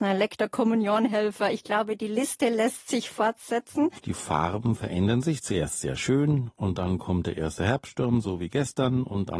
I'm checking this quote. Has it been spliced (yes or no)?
yes